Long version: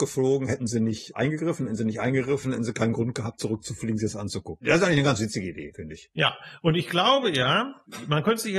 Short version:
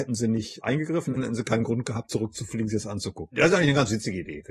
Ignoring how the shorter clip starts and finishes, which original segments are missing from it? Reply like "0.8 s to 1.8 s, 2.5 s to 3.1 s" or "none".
1.7 s to 2.5 s